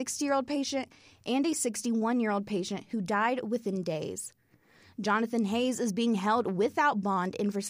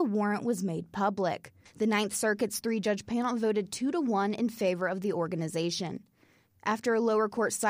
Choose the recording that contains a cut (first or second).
second